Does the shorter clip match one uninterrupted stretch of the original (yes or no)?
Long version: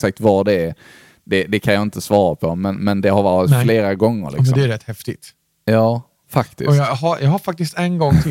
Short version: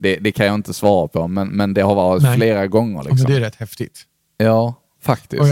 yes